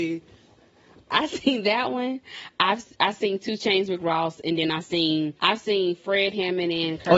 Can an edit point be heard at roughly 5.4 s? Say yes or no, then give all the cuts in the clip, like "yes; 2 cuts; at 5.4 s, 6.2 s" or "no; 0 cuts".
yes; 2 cuts; at 1.1 s, 5.4 s